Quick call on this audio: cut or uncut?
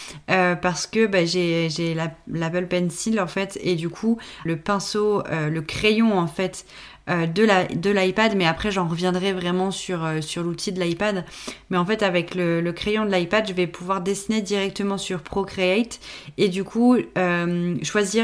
cut